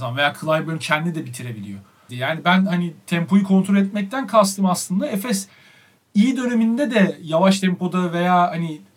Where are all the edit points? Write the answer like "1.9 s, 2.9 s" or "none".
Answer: 2.1 s